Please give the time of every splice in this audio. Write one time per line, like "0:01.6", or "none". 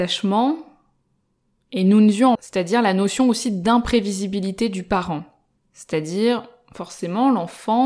0:02.3
0:05.6

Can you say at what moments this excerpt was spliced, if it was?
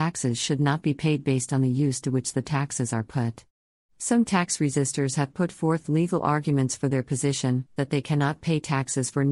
0:07.8

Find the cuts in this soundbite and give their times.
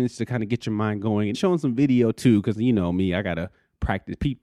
0:01.3

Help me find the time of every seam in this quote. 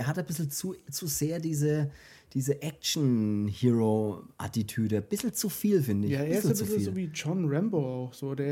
none

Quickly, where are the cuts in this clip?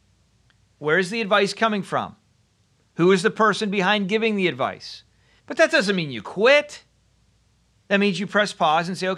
0:05.4
0:07.8

